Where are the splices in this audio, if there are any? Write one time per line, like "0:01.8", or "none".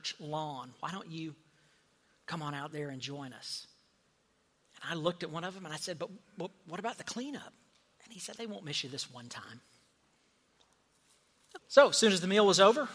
0:08.4
0:11.6